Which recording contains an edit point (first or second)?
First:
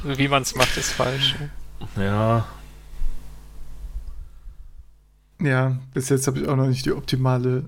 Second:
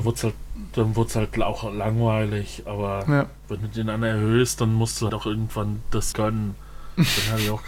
second